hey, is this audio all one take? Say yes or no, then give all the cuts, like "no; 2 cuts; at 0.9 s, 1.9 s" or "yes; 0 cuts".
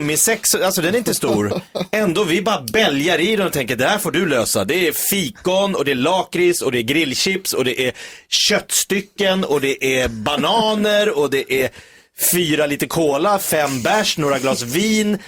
yes; 0 cuts